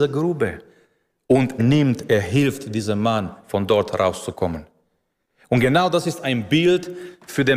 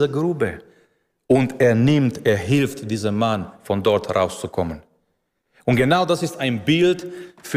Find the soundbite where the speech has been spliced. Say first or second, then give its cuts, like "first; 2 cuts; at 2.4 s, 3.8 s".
first; 1 cut; at 1.6 s